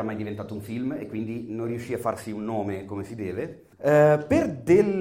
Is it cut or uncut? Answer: cut